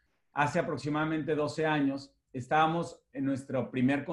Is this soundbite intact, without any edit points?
no; 1 cut; at 3.1 s

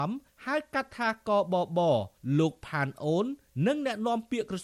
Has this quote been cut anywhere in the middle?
no; 0 cuts

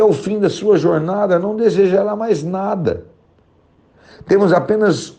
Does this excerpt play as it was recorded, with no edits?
yes; 0 cuts

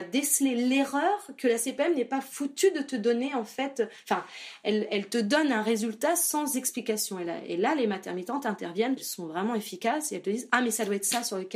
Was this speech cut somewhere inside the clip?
no; 0 cuts

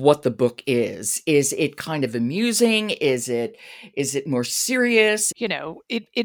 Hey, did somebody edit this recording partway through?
yes; 1 cut; at 5.3 s

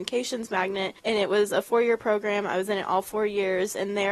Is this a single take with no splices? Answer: no; 1 cut; at 1.0 s

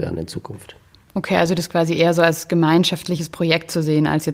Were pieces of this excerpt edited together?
no; 0 cuts

